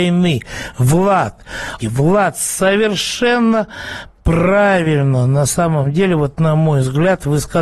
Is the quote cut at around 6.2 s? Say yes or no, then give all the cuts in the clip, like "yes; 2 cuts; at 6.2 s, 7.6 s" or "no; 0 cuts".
no; 1 cut; at 1.8 s